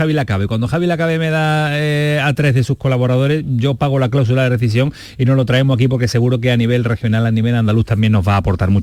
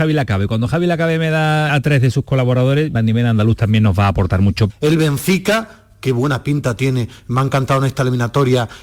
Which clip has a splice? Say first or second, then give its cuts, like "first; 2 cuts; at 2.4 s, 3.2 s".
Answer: second; 3 cuts; at 1.7 s, 2.9 s, 4.7 s